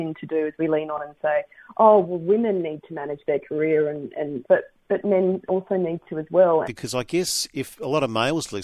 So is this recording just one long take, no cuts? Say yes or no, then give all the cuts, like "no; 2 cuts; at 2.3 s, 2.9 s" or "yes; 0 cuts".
no; 2 cuts; at 4.4 s, 6.6 s